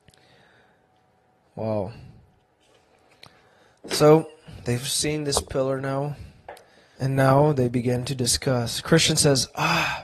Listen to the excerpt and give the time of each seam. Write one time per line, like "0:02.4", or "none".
0:01.4
0:07.0